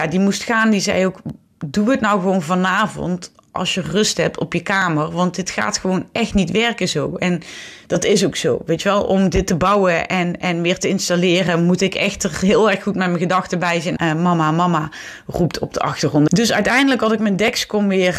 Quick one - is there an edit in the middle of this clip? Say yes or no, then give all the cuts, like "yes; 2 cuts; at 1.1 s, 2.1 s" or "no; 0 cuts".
yes; 2 cuts; at 14.0 s, 16.3 s